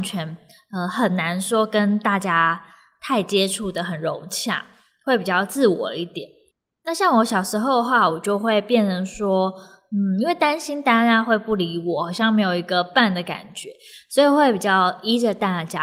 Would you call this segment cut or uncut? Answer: uncut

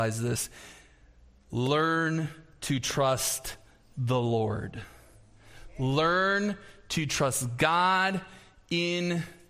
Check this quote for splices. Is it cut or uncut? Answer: uncut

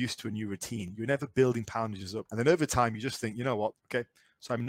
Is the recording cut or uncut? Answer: cut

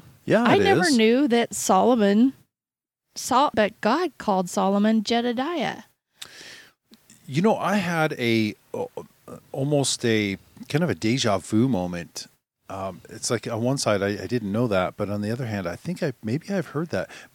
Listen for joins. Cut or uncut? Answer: cut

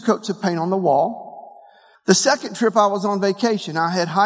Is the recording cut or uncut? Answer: cut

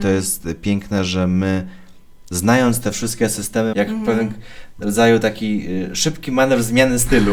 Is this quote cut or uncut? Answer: cut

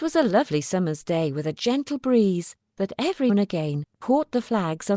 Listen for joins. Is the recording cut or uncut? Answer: cut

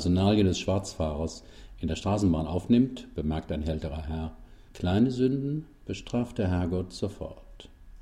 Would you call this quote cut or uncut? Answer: cut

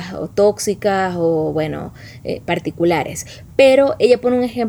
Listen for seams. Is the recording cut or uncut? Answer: uncut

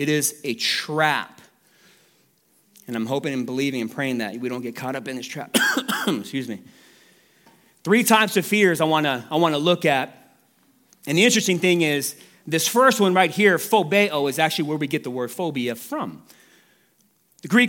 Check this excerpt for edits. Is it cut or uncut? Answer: uncut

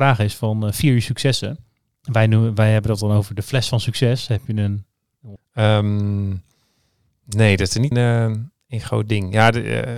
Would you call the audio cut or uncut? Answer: cut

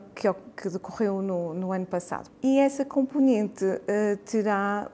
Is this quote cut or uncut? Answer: cut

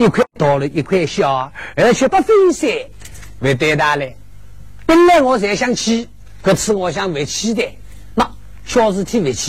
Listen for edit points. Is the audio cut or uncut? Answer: cut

